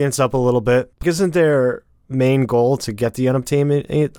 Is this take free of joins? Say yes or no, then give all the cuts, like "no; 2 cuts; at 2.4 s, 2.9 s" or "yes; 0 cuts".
no; 1 cut; at 1.0 s